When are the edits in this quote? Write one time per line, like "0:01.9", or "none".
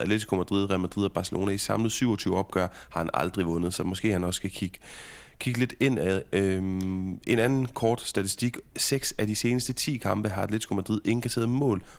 none